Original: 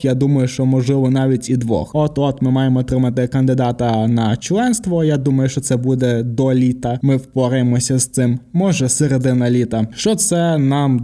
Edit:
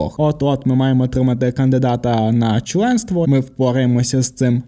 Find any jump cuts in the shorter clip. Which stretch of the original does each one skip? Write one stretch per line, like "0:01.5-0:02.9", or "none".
0:05.0-0:07.0